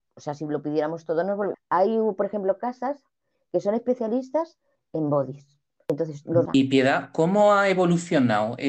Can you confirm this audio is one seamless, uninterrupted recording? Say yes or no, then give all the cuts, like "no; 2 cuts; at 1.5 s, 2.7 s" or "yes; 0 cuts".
no; 2 cuts; at 1.5 s, 6.5 s